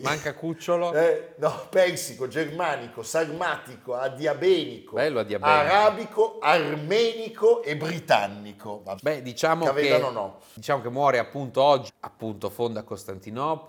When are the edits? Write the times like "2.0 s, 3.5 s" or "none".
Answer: 9.0 s, 11.9 s